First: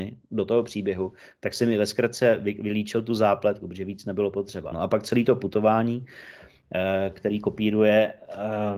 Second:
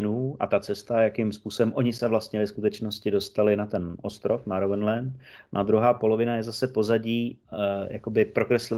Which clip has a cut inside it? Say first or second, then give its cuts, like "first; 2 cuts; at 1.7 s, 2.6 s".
first; 1 cut; at 4.7 s